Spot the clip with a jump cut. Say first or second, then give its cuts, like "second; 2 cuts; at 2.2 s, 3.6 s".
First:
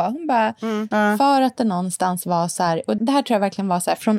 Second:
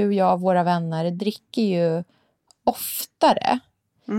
first; 2 cuts; at 0.9 s, 3.0 s